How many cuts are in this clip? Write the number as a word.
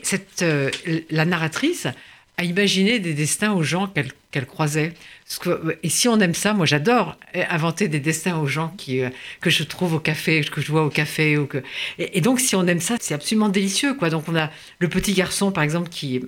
one